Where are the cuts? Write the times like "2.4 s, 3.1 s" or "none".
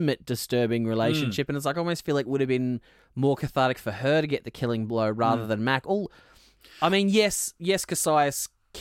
none

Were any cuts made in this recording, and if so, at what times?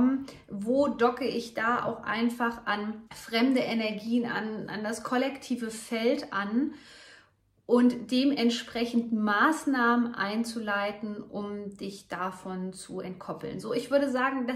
3.1 s

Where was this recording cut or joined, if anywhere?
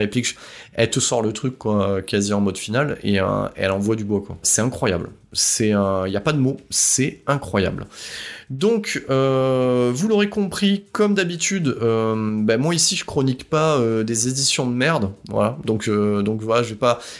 4.4 s

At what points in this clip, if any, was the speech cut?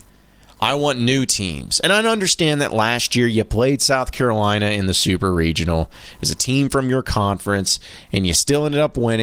none

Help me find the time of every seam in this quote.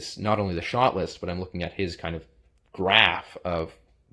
none

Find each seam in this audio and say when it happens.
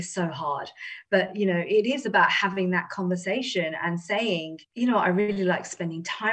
4.7 s

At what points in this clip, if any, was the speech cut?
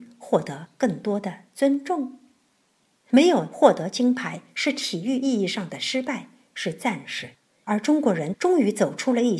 2.9 s

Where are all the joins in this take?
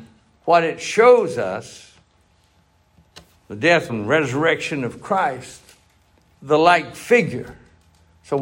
3.9 s, 6.3 s

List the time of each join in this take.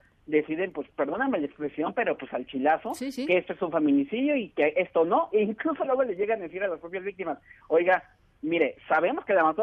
none

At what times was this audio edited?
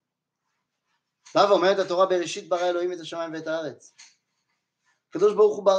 none

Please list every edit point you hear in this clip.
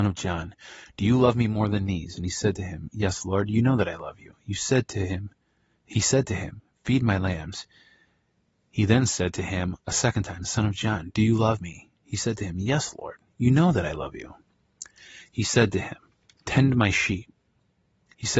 10.4 s

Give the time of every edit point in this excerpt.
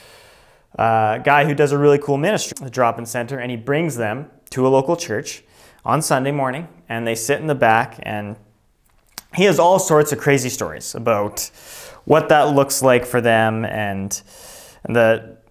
2.5 s

